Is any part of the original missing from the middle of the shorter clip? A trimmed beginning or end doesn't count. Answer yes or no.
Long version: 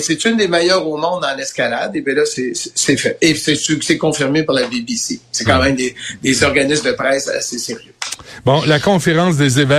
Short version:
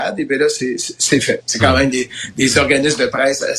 yes